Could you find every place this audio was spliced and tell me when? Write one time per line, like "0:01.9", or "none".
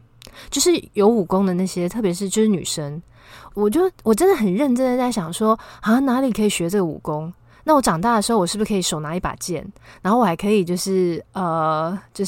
0:03.5